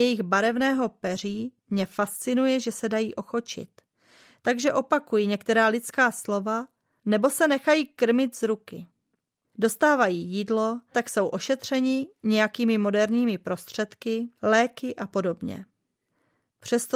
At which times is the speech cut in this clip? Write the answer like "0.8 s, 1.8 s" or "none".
9.5 s, 10.9 s, 14.4 s